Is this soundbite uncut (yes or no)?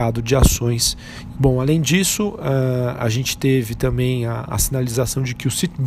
no